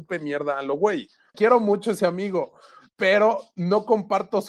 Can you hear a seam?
yes; 1 cut; at 1.3 s

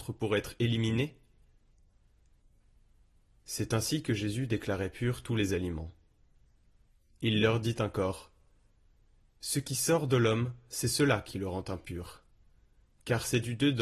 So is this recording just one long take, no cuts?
yes; 0 cuts

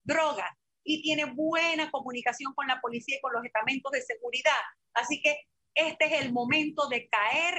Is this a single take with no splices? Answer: yes; 0 cuts

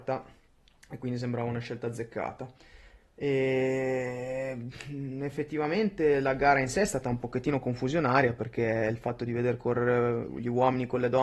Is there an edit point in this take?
no; 0 cuts

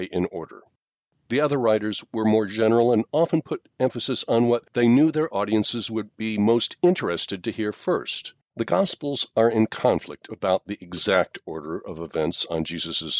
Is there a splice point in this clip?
yes; 1 cut; at 8.5 s

